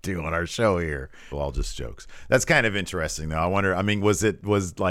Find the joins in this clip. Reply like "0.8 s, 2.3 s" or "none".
1.3 s